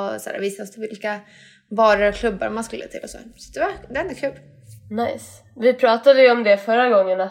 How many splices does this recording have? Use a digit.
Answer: 0